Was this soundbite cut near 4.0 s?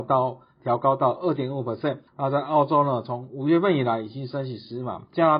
no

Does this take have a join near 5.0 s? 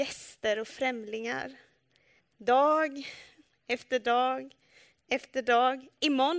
no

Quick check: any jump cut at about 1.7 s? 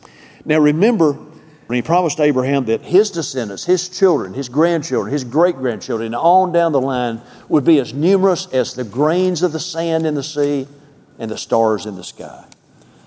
yes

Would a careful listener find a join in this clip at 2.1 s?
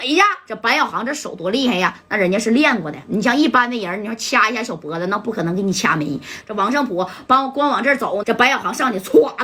no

